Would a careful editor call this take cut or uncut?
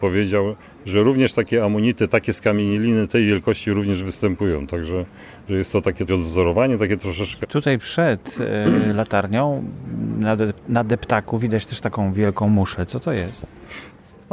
cut